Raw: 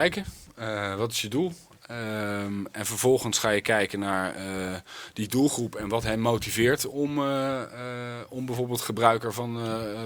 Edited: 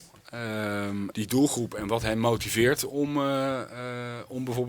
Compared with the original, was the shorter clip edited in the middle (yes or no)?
yes